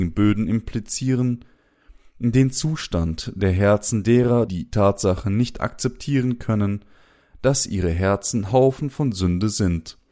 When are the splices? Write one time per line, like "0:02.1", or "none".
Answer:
0:04.5